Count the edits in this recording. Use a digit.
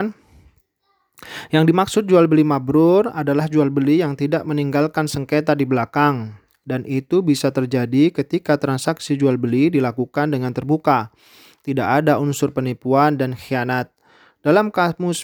0